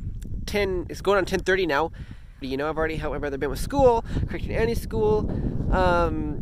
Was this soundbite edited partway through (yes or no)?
yes